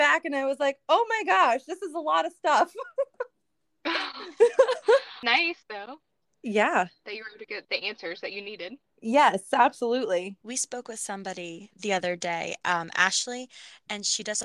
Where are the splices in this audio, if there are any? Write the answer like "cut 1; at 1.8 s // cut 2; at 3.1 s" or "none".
none